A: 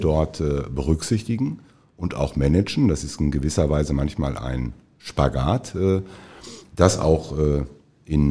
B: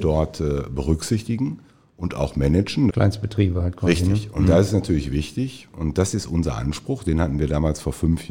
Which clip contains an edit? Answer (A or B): B